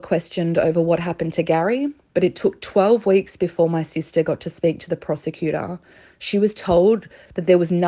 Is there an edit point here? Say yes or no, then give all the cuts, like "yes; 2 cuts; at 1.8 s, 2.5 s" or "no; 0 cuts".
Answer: no; 0 cuts